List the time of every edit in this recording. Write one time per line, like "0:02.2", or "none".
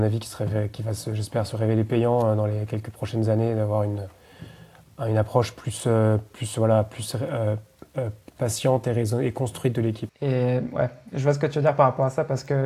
0:10.1